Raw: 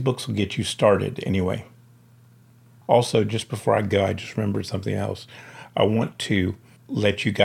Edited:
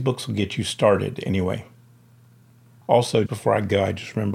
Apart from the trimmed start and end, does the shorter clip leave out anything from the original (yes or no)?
yes